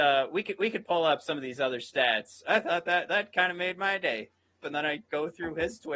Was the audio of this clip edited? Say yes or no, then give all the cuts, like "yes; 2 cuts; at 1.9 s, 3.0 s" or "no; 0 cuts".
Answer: yes; 2 cuts; at 2.4 s, 4.6 s